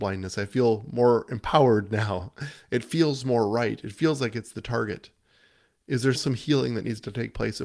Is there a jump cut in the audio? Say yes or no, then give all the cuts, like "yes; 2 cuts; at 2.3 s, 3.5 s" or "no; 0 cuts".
yes; 1 cut; at 6.2 s